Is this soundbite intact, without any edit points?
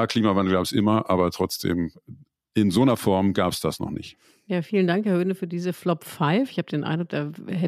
yes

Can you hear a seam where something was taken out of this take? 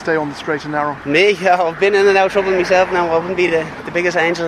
no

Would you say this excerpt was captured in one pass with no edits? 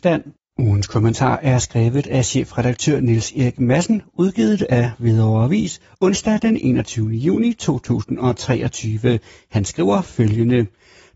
yes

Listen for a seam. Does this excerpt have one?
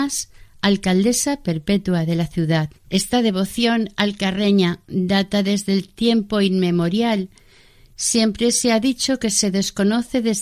yes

